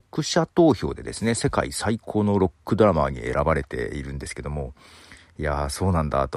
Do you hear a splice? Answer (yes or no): no